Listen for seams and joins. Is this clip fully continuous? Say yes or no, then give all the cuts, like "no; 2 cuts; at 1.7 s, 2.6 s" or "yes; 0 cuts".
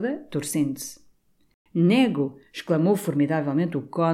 yes; 0 cuts